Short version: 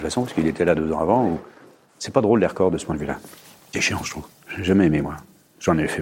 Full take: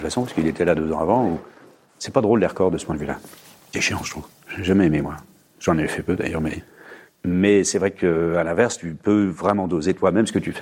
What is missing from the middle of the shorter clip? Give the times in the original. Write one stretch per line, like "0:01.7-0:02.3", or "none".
none